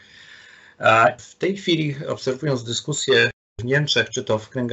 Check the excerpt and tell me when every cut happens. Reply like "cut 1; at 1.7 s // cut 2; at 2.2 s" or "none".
cut 1; at 1.2 s